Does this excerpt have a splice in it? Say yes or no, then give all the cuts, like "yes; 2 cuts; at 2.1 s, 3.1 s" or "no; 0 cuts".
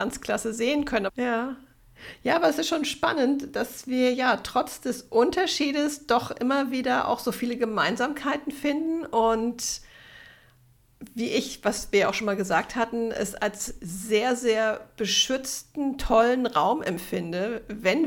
yes; 1 cut; at 1.1 s